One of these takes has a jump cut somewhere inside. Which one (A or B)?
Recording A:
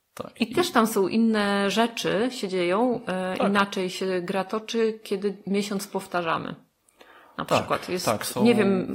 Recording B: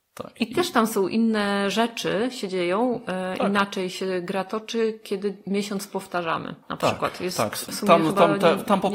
B